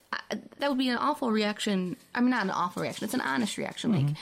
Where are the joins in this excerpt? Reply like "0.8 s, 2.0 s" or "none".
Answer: none